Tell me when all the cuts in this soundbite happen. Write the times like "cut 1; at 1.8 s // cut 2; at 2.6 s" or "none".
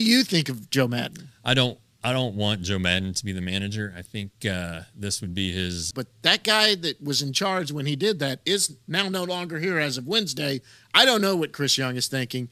cut 1; at 5.9 s